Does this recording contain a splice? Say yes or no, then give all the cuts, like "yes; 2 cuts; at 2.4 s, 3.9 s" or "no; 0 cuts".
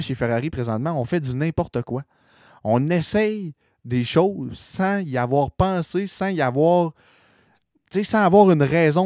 no; 0 cuts